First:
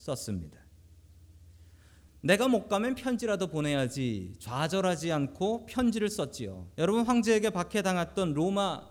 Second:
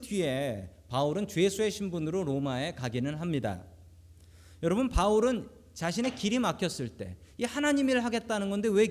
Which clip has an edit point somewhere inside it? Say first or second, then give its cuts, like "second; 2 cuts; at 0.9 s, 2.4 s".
first; 1 cut; at 6.7 s